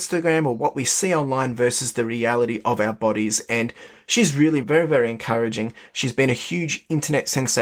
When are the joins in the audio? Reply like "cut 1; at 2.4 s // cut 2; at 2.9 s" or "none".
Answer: cut 1; at 4.6 s